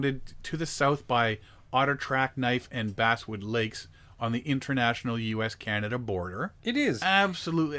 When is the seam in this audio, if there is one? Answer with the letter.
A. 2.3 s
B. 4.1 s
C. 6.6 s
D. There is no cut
C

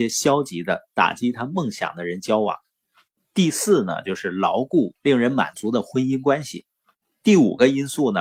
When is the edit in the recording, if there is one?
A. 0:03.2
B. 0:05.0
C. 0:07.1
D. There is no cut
B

